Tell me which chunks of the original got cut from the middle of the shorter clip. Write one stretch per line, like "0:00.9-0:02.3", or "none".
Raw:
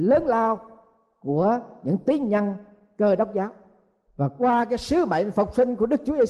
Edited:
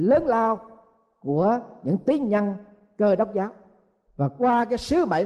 none